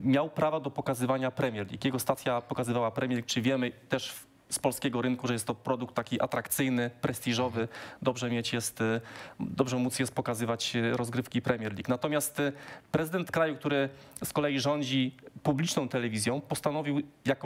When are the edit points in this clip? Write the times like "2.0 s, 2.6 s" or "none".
none